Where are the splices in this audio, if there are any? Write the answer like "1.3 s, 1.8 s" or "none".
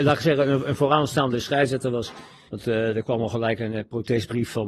2.5 s